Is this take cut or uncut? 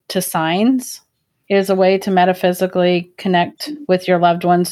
cut